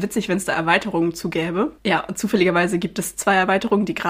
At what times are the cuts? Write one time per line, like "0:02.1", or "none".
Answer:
none